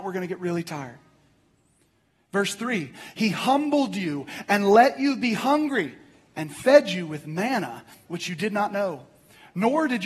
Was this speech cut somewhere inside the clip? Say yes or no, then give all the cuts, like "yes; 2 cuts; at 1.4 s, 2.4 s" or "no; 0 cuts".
no; 0 cuts